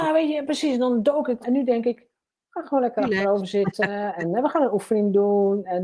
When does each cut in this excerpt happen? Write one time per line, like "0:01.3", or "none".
0:01.4

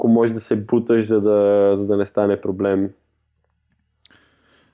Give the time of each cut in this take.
none

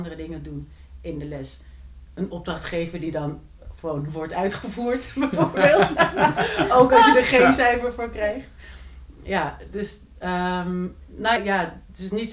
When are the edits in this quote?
0:11.4

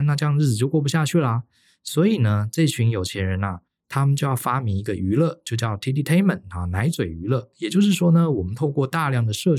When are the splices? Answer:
none

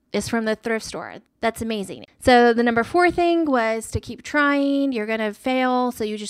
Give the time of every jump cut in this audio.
0:02.1

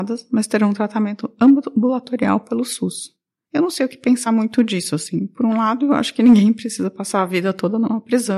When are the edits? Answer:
none

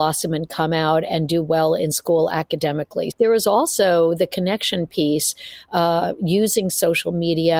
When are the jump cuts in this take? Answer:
0:03.1

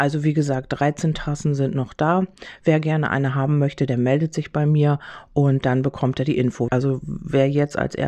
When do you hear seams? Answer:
0:06.7

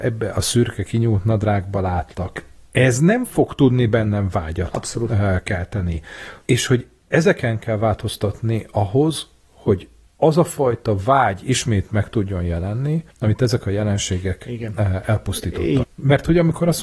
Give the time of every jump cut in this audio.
0:13.1
0:15.8

